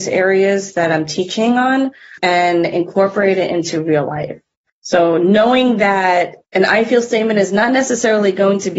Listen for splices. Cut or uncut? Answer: cut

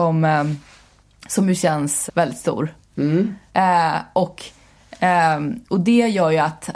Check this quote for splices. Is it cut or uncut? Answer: cut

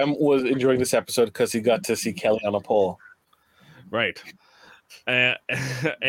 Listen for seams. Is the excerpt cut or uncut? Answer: uncut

